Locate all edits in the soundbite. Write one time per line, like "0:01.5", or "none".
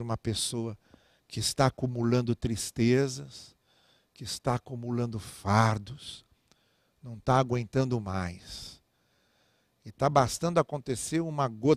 none